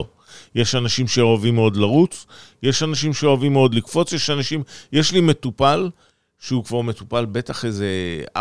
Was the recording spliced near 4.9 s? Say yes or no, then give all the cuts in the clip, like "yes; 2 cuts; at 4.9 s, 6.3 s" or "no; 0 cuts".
no; 0 cuts